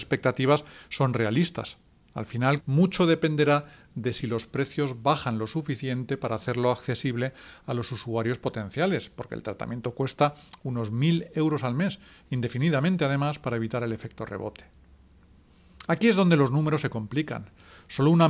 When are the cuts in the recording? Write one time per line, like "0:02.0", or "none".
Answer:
0:02.6